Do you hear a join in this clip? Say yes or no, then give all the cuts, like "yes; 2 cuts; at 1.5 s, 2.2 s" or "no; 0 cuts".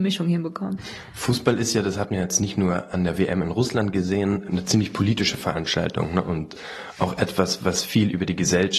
no; 0 cuts